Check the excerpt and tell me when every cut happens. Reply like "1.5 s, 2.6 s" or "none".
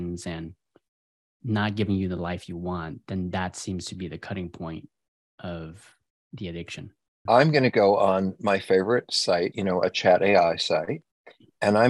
7.3 s, 9.5 s